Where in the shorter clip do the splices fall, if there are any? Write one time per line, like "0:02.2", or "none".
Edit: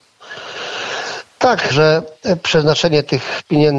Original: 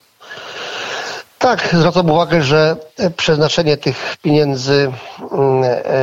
0:01.7